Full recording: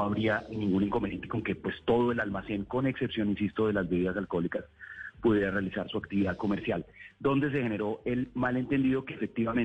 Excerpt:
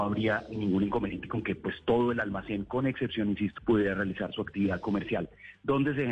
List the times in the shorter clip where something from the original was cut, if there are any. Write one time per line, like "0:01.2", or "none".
0:03.6